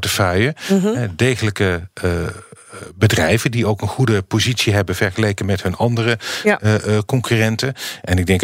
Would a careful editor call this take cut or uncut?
uncut